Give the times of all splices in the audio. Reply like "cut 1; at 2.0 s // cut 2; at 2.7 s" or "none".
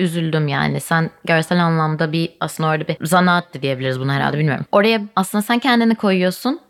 cut 1; at 4.7 s

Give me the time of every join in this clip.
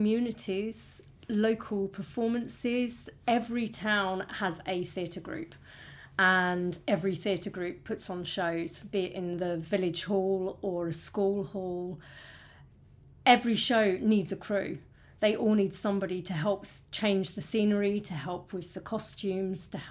none

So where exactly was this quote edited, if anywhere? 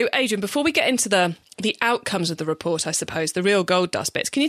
none

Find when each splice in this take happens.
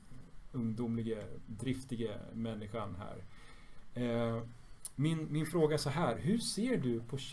cut 1; at 1.5 s

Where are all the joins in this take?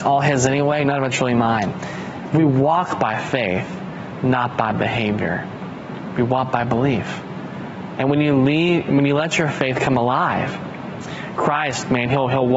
none

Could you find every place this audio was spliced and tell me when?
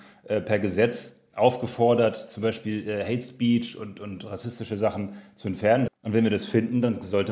cut 1; at 5.9 s

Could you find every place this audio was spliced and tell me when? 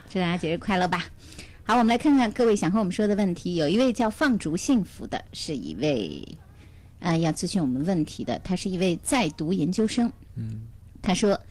none

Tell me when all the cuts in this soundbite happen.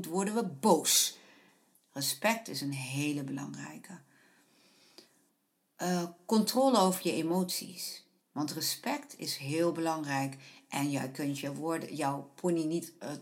cut 1; at 1.7 s // cut 2; at 8.2 s

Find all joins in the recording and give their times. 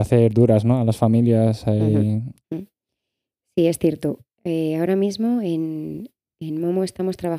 cut 1; at 2.4 s

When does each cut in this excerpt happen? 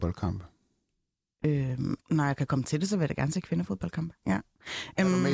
cut 1; at 2.0 s // cut 2; at 4.2 s

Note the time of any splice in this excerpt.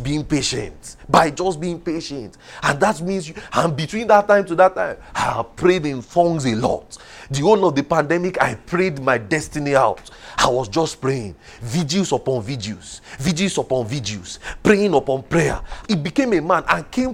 cut 1; at 15.8 s

